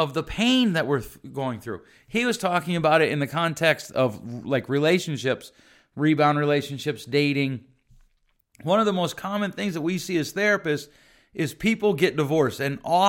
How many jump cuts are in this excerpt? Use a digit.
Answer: 0